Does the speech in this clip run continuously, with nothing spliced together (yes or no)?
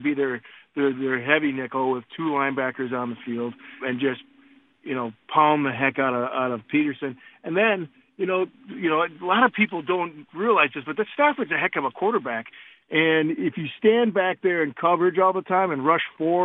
no